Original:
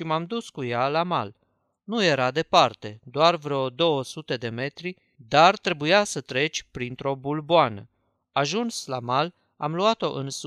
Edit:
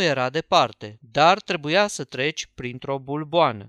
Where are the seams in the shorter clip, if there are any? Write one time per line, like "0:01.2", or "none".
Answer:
0:01.0